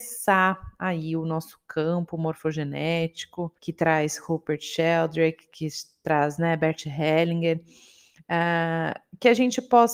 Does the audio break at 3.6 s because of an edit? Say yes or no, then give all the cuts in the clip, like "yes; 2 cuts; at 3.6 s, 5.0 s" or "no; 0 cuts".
yes; 1 cut; at 3.6 s